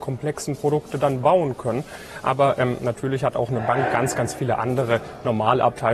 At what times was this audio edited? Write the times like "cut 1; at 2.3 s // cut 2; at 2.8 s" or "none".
none